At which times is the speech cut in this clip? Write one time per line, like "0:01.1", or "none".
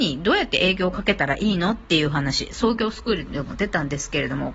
none